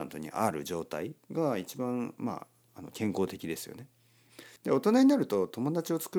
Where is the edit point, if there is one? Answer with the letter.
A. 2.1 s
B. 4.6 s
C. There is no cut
B